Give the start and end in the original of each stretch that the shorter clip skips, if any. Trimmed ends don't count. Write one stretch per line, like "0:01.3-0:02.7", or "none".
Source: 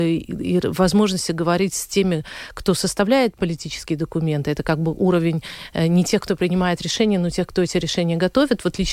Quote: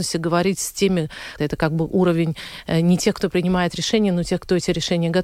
0:02.5-0:04.4